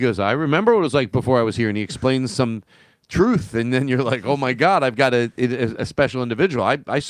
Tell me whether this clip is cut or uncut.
uncut